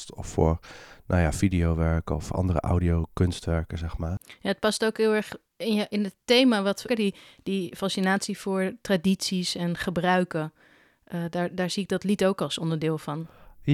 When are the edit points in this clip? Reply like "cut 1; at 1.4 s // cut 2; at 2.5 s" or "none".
cut 1; at 6.9 s